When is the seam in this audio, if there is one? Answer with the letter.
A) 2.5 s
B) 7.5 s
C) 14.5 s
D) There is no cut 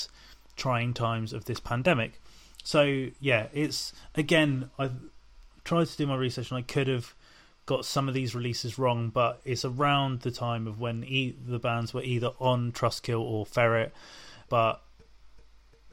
C